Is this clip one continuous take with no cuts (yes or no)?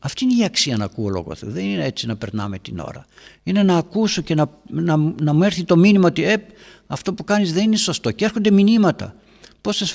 yes